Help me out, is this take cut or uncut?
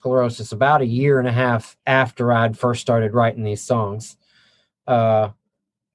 cut